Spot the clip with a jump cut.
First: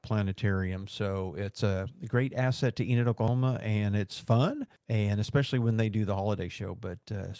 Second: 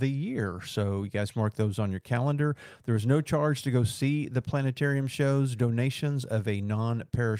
first; 1 cut; at 4.8 s

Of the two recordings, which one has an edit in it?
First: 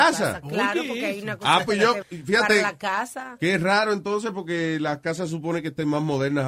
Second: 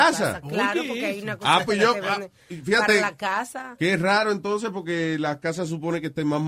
first; 1 cut; at 2.0 s

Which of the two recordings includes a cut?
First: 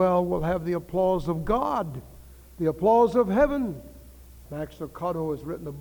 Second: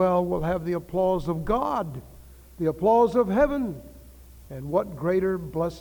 first; 1 cut; at 4.5 s

